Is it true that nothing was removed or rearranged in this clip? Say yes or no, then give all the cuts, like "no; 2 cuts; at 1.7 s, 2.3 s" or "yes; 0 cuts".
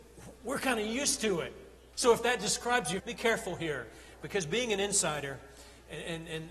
no; 2 cuts; at 1.9 s, 3.0 s